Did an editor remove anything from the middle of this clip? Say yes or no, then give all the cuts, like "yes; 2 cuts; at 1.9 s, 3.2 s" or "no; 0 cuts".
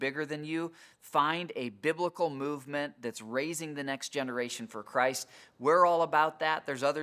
no; 0 cuts